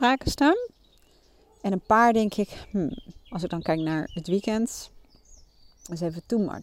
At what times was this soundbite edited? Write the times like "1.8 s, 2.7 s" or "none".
none